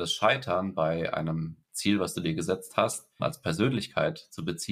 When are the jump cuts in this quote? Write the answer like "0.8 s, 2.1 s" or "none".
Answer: 3.2 s